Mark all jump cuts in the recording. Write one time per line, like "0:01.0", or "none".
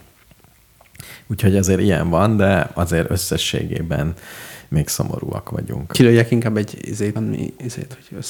0:07.2